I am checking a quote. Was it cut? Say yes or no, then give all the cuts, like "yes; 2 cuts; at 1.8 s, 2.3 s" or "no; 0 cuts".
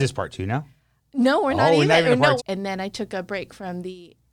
yes; 1 cut; at 2.4 s